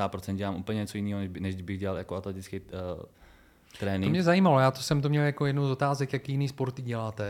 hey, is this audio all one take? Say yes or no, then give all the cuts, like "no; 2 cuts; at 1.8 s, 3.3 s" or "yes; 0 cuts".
yes; 0 cuts